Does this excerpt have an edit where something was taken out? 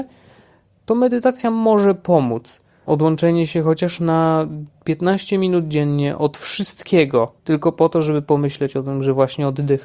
yes; 2 cuts; at 2.9 s, 7.4 s

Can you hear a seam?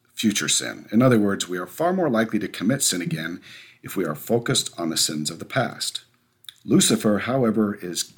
no; 0 cuts

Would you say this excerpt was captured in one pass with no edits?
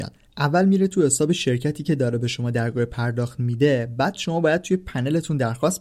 yes; 0 cuts

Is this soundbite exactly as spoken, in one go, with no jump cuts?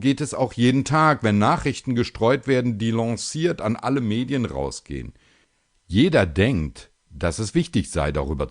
yes; 0 cuts

